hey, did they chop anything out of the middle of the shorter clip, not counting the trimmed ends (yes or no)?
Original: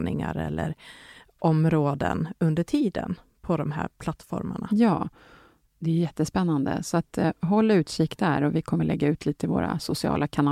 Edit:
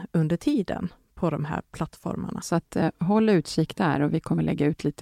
yes